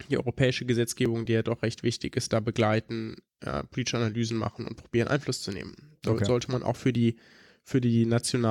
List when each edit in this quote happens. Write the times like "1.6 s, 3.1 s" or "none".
none